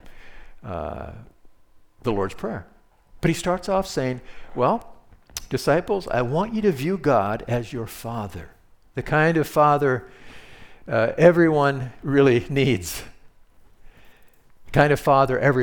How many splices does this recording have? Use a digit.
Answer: 1